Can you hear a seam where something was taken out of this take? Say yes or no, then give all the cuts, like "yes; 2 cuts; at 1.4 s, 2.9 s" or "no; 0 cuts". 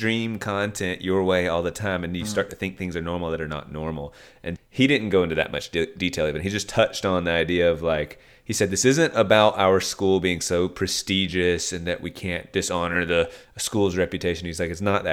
yes; 1 cut; at 4.6 s